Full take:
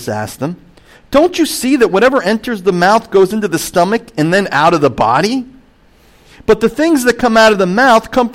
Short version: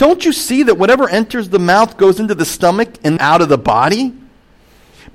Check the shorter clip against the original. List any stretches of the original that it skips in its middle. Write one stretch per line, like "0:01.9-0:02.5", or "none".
0:04.3-0:04.5